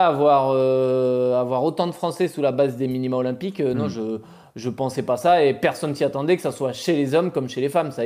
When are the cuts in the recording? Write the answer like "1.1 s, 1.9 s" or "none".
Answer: none